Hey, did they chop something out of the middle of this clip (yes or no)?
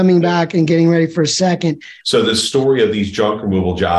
yes